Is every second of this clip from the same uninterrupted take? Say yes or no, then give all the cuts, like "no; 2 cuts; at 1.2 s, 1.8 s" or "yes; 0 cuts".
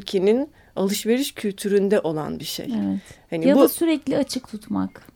yes; 0 cuts